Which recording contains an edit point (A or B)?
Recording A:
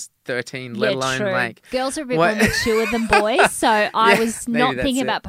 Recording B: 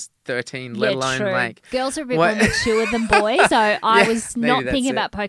B